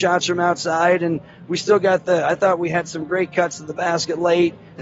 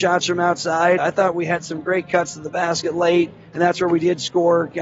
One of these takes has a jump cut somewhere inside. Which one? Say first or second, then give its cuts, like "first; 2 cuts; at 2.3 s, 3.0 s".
second; 1 cut; at 1.0 s